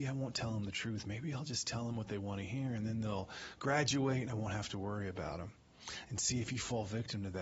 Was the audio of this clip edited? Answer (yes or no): no